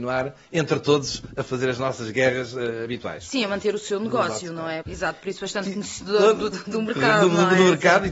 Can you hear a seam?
yes; 2 cuts; at 4.8 s, 6.5 s

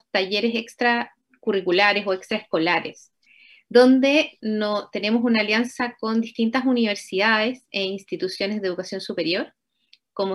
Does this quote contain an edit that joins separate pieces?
no; 0 cuts

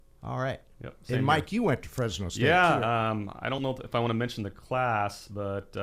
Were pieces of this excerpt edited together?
no; 0 cuts

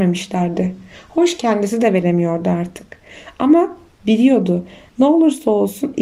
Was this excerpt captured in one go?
yes; 0 cuts

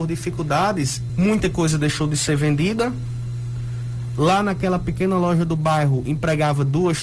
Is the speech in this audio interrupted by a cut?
yes; 1 cut; at 1.1 s

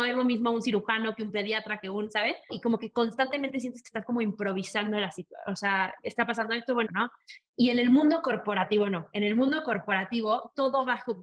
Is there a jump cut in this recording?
yes; 2 cuts; at 2.5 s, 6.9 s

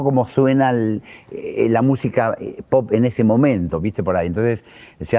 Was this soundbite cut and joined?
no; 0 cuts

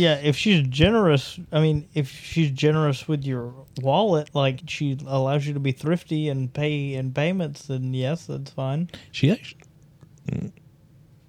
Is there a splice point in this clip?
yes; 1 cut; at 4.6 s

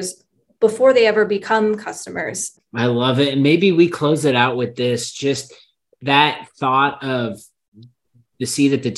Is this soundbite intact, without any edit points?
no; 1 cut; at 2.6 s

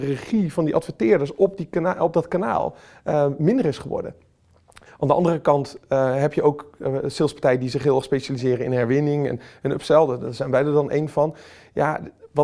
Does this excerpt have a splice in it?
no; 0 cuts

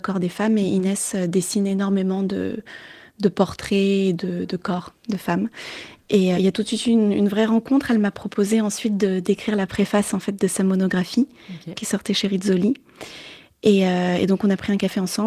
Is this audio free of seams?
no; 1 cut; at 6.3 s

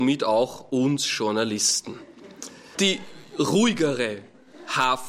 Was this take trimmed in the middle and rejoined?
yes; 1 cut; at 2.7 s

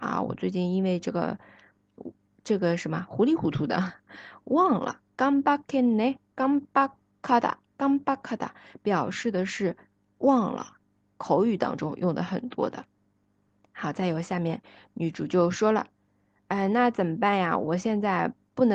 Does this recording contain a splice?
no; 0 cuts

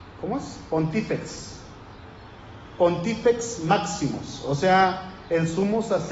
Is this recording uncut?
yes; 0 cuts

